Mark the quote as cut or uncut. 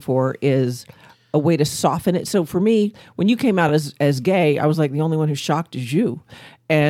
uncut